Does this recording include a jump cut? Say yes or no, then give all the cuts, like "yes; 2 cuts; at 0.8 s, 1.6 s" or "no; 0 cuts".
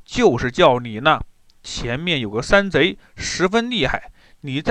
no; 0 cuts